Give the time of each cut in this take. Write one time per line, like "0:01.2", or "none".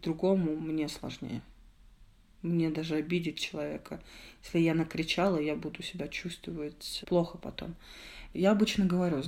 0:07.0
0:08.3